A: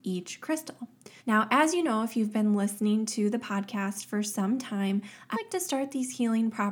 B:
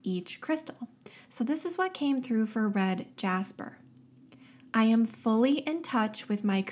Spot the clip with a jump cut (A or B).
A